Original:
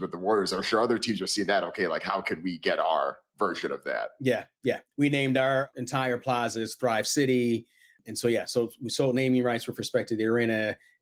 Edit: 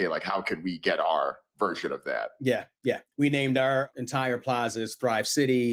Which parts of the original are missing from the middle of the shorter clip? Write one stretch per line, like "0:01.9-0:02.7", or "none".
none